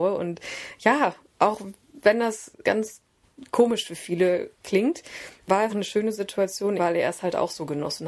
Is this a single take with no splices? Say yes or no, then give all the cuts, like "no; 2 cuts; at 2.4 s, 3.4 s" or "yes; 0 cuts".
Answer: no; 3 cuts; at 2.6 s, 5.7 s, 6.8 s